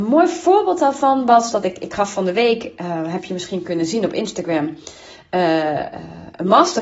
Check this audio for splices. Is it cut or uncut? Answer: uncut